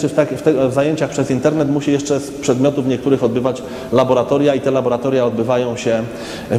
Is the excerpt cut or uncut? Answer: uncut